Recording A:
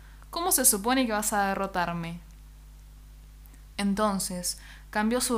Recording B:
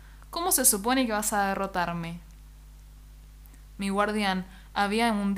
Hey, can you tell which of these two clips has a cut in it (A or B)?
B